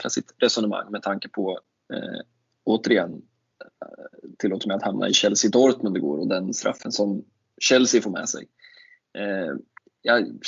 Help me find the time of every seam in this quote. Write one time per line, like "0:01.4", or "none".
none